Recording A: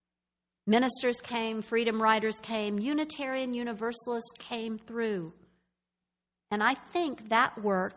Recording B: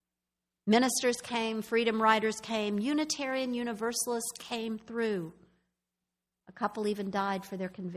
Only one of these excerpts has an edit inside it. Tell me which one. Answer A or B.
A